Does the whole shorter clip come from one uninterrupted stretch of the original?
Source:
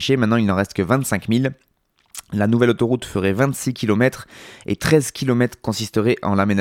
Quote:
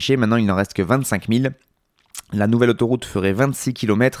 yes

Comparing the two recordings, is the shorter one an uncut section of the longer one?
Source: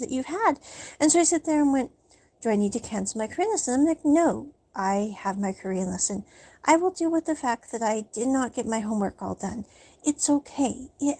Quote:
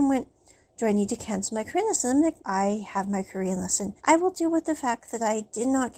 no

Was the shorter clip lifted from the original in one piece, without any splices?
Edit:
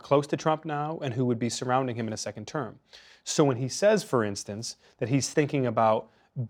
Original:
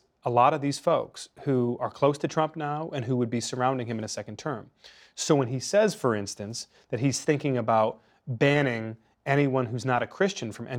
yes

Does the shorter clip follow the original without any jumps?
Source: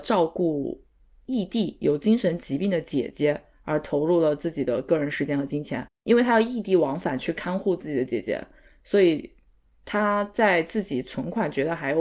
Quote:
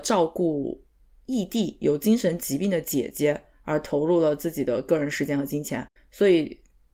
no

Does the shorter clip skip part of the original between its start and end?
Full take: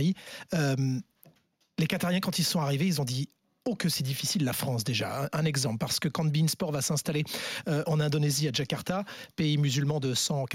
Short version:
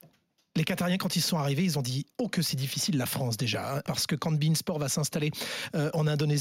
yes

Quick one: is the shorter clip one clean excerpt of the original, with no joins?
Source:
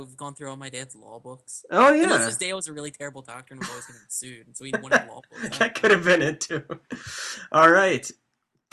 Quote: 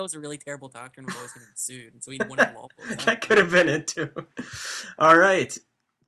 yes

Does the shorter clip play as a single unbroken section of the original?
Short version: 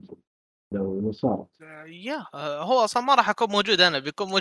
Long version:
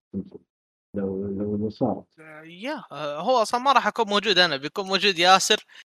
no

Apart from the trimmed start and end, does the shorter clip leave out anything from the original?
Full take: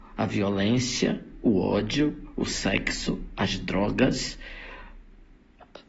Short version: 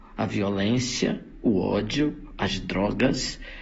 yes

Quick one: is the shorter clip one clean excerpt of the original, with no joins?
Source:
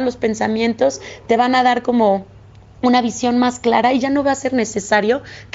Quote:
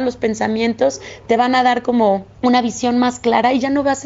no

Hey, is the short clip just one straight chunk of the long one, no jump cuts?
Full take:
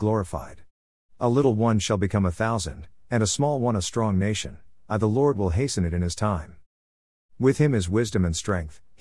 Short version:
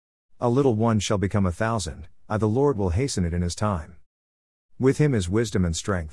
no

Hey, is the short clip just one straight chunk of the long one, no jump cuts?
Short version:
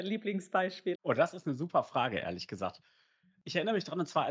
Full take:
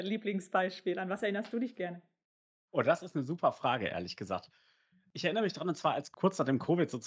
no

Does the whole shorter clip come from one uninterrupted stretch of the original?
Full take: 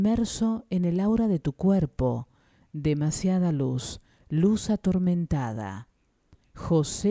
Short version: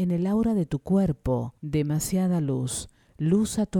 no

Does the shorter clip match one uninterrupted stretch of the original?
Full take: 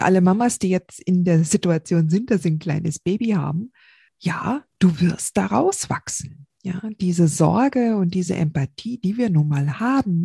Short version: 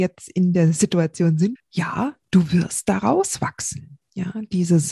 no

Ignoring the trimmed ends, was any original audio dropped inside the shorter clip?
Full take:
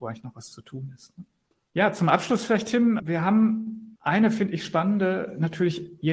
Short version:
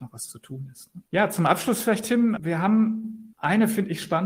yes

